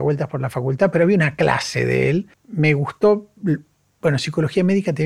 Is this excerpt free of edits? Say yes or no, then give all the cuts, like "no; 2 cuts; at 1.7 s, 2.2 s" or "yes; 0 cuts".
no; 1 cut; at 2.3 s